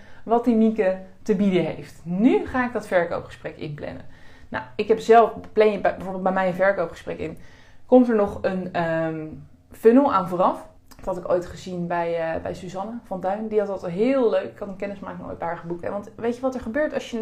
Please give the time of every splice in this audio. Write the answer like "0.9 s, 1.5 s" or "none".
10.8 s, 15.8 s